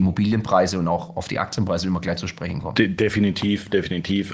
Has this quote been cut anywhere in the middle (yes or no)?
no